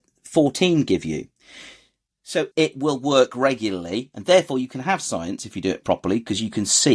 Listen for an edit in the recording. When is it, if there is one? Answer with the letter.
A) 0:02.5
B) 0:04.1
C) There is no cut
A